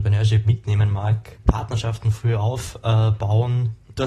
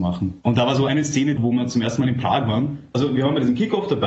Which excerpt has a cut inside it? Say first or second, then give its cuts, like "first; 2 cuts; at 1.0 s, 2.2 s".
second; 1 cut; at 1.4 s